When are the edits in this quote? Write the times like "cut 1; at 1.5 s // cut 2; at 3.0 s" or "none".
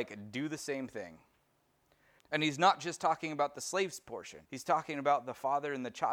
cut 1; at 2.2 s // cut 2; at 4.5 s